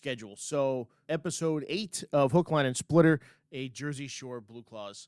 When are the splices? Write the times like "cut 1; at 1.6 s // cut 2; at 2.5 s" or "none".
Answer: cut 1; at 1.1 s